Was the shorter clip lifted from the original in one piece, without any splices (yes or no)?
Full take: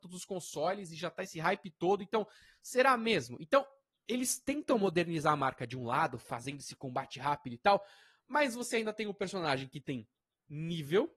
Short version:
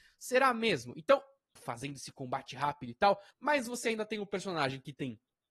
no